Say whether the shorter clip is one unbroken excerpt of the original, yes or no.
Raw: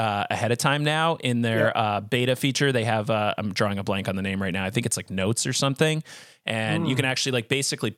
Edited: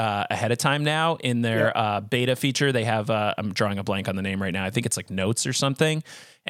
yes